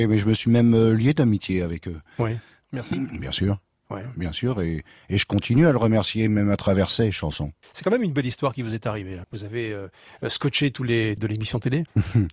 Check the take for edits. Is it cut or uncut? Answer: cut